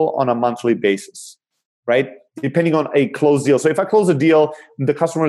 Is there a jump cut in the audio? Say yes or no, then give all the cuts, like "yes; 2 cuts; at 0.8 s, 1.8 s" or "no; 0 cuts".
no; 0 cuts